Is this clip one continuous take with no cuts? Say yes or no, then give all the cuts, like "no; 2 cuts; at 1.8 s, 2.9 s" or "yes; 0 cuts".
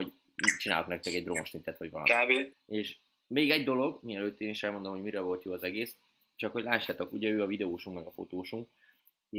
no; 2 cuts; at 2.5 s, 7.1 s